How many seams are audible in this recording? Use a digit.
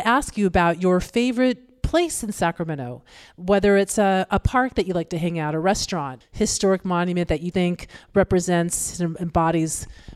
2